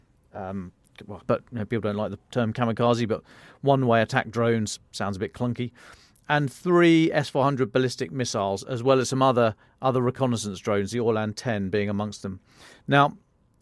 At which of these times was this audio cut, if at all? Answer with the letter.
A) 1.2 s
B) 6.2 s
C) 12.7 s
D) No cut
A